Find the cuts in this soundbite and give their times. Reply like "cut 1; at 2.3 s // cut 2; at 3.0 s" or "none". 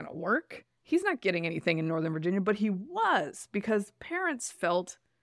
none